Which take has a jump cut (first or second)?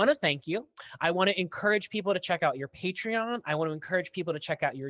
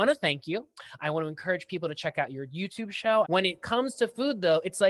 second